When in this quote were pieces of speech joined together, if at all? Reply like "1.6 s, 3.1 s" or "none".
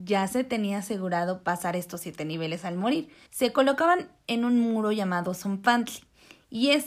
3.3 s